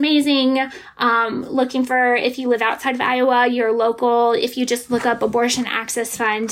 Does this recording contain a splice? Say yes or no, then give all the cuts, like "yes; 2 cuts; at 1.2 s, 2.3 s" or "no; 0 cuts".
no; 0 cuts